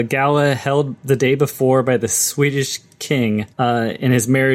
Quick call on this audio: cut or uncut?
cut